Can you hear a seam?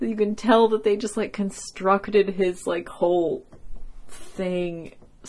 no; 0 cuts

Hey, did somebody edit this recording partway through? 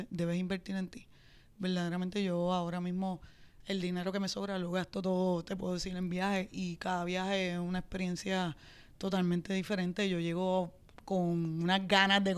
no; 0 cuts

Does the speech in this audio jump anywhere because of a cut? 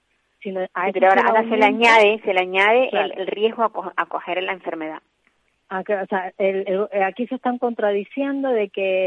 no; 0 cuts

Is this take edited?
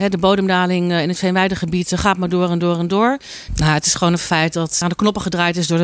yes; 2 cuts; at 3.5 s, 4.8 s

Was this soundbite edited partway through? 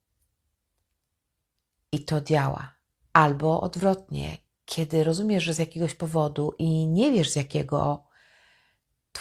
yes; 1 cut; at 3.0 s

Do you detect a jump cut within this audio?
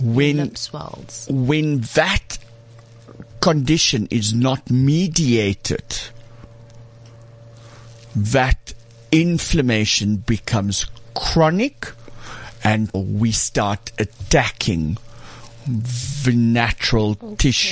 yes; 1 cut; at 12.9 s

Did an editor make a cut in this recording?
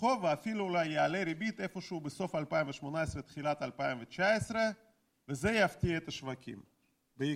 no; 0 cuts

